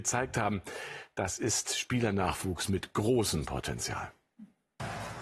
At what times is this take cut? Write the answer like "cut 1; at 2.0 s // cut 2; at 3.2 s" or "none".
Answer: none